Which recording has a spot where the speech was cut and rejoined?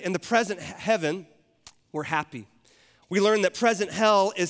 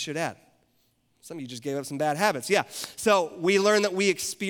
first; 1 cut; at 3.0 s

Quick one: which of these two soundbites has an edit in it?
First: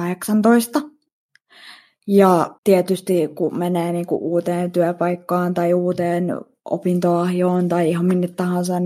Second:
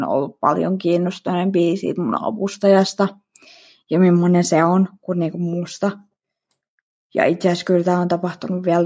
first; 1 cut; at 2.6 s

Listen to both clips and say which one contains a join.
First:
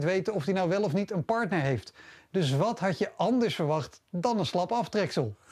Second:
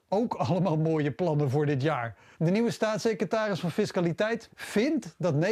second; 2 cuts; at 2.3 s, 4.5 s

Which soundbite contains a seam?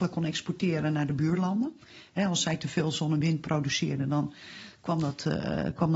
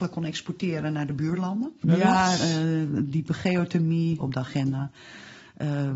second; 2 cuts; at 1.8 s, 4.2 s

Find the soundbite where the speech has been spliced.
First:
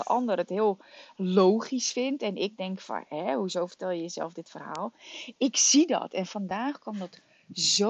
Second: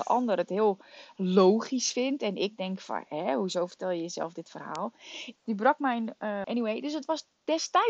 second; 2 cuts; at 5.4 s, 6.4 s

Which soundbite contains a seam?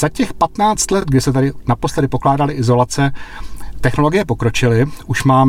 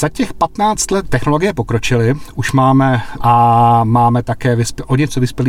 second; 2 cuts; at 1.0 s, 3.2 s

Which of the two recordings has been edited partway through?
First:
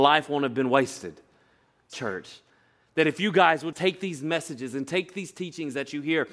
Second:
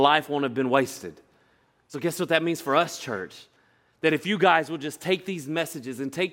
first; 2 cuts; at 1.9 s, 3.7 s

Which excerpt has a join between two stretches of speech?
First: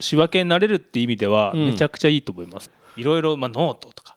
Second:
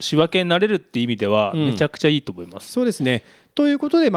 first; 1 cut; at 2.7 s

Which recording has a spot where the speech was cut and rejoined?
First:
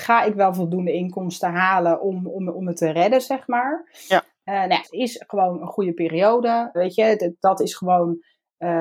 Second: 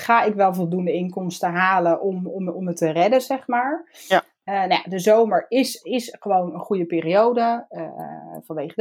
first; 2 cuts; at 4.8 s, 6.7 s

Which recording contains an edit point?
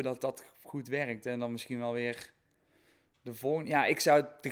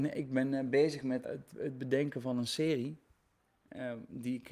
second; 1 cut; at 1.2 s

